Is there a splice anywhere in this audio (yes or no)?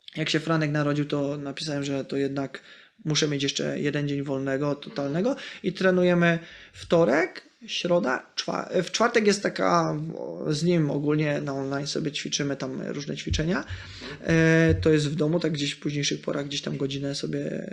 no